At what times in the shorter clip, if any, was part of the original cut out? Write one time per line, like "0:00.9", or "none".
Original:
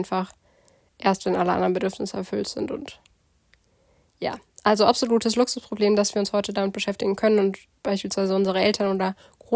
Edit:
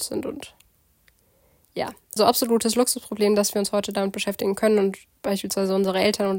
0:02.2